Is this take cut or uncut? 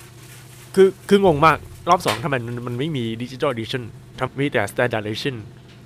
cut